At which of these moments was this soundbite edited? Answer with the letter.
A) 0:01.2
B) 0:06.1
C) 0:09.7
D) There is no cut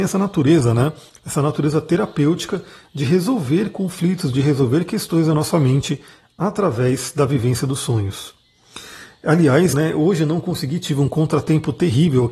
C